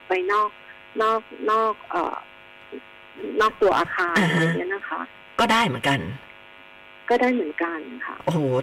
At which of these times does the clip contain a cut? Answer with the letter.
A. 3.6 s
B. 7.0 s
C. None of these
C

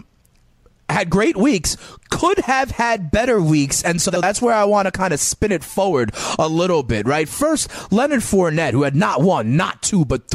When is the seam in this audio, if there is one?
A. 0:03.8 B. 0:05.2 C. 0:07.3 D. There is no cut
D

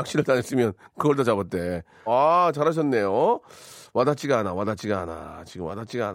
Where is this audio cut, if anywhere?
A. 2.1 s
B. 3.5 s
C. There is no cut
A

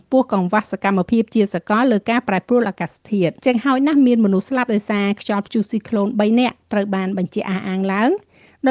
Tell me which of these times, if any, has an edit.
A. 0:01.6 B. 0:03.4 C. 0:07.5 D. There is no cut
B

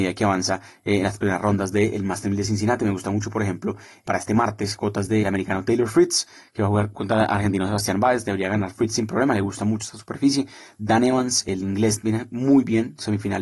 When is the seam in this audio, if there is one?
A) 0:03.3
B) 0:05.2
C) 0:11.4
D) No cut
B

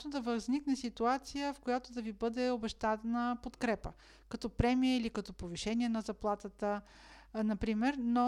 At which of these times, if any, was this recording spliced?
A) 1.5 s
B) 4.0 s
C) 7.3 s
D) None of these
D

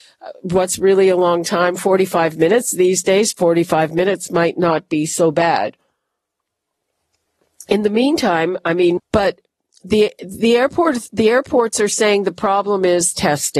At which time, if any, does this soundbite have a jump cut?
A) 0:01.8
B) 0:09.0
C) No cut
B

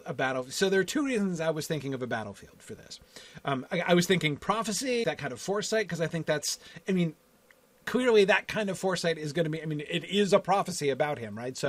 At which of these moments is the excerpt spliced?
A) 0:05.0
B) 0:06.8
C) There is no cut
A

